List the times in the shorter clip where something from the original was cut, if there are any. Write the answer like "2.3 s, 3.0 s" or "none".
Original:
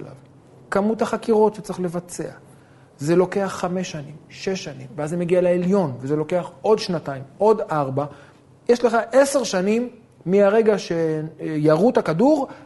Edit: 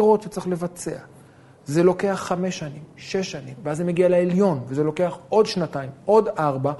none